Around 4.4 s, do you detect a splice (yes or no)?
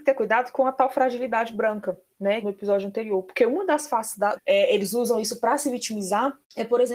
yes